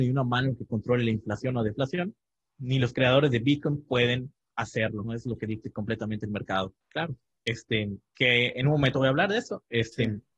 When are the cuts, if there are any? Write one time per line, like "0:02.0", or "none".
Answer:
0:05.0
0:06.8